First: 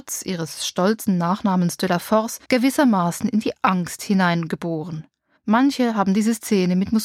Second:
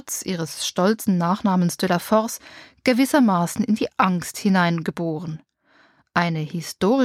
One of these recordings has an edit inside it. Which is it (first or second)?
first